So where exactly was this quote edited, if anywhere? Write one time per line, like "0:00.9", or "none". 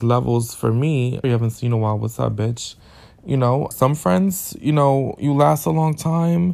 0:01.2
0:03.7